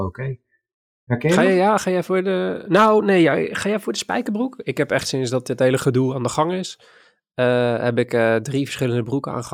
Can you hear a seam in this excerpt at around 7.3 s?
no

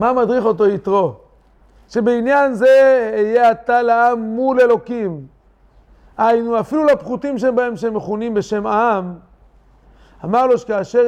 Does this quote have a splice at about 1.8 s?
no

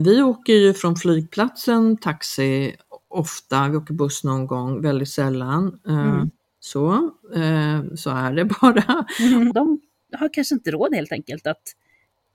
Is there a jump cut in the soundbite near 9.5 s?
yes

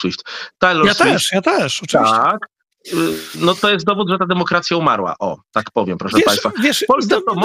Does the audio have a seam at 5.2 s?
no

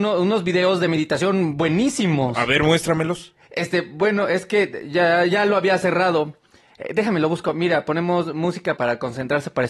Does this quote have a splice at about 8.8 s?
yes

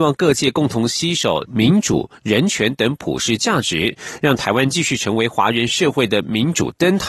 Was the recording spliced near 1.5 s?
yes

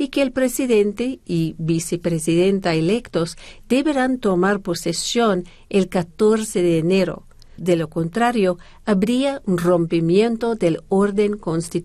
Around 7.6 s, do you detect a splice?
yes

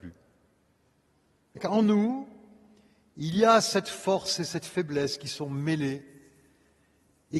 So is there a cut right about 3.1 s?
no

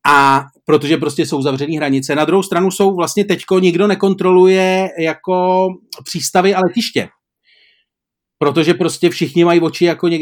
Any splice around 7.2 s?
no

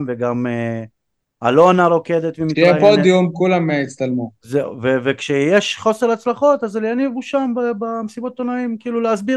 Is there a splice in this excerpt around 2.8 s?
no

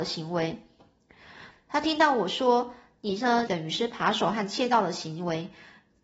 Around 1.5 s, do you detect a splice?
yes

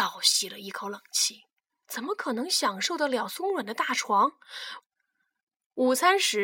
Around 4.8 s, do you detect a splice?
yes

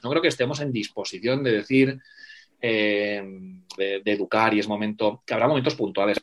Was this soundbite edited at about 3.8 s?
yes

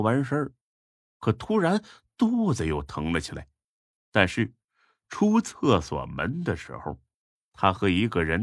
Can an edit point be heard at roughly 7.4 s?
no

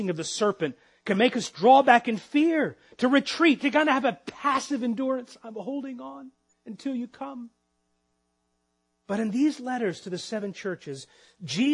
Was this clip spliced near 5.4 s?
no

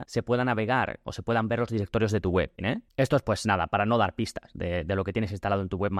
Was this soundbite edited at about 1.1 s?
no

